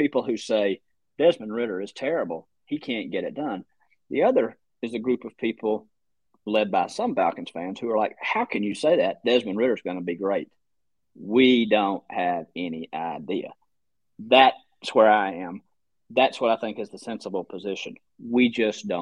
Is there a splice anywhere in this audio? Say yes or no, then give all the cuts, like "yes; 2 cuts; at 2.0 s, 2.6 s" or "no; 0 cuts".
no; 0 cuts